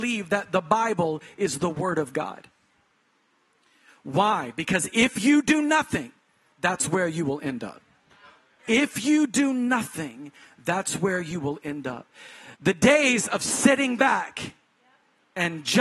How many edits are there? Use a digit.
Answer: 2